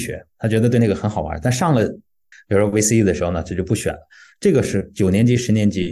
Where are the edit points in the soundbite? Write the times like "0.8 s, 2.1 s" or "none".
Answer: 2.3 s